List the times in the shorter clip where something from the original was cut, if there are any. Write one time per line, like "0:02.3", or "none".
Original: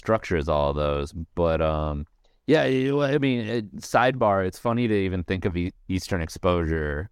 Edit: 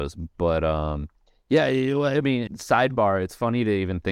0:02.5